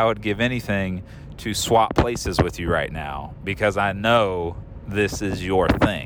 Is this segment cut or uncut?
uncut